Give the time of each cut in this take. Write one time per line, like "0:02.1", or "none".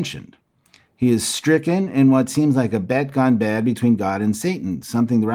none